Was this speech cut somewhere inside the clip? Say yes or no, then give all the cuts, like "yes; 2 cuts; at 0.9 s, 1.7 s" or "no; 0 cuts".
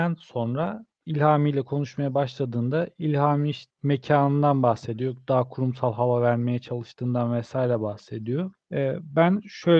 no; 0 cuts